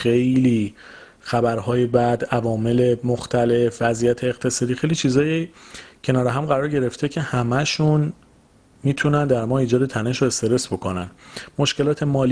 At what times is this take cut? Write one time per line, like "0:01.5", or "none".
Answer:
none